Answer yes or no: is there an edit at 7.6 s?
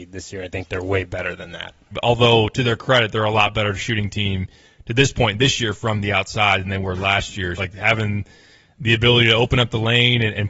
yes